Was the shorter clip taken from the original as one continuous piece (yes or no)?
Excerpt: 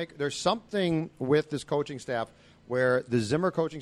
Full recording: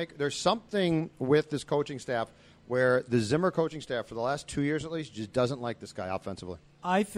yes